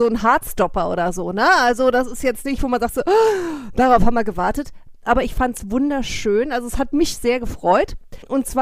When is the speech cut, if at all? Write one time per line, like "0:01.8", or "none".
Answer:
none